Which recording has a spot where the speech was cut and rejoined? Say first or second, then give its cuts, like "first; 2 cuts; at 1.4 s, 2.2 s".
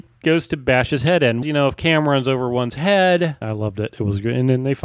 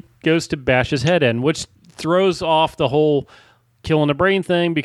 first; 2 cuts; at 1.4 s, 3.4 s